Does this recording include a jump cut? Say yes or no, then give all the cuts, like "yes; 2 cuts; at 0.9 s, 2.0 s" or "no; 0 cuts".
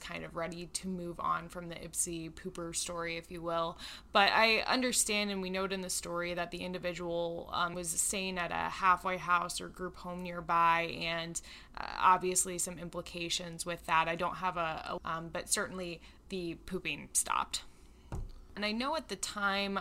yes; 3 cuts; at 7.7 s, 15.0 s, 18.6 s